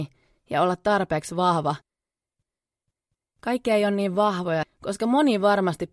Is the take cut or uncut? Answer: cut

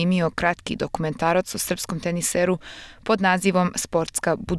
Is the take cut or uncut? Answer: uncut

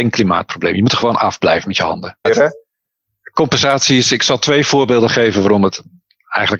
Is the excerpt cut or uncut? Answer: cut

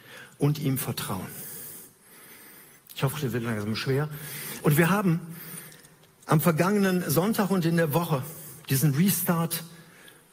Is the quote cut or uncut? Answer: cut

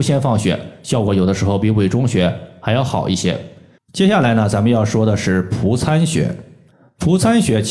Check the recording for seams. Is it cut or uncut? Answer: cut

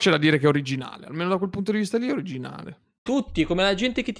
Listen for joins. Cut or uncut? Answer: cut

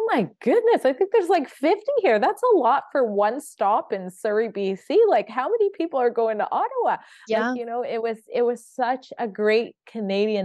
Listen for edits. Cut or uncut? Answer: uncut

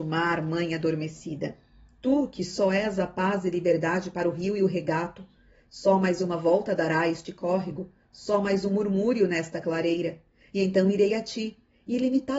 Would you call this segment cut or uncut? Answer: uncut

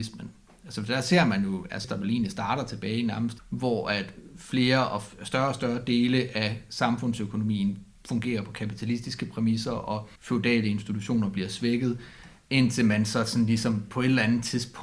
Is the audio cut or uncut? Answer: cut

